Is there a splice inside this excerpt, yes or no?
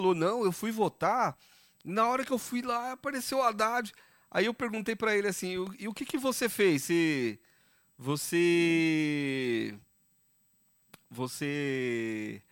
no